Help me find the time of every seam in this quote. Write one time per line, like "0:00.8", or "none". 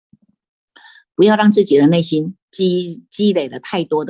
none